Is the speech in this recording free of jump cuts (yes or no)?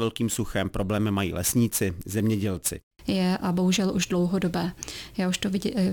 no